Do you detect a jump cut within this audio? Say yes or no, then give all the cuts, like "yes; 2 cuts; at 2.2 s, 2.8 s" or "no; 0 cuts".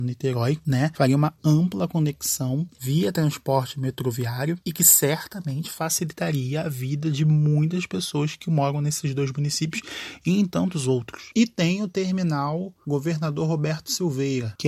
yes; 1 cut; at 11.3 s